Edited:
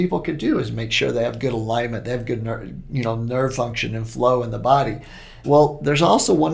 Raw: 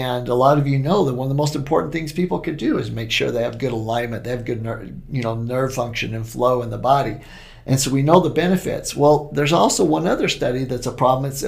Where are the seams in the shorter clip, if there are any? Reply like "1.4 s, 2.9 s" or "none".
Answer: 5.4 s